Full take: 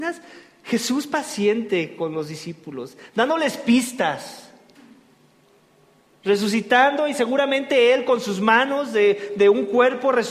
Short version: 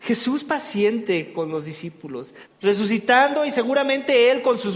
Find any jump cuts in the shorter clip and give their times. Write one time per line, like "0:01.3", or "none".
0:02.4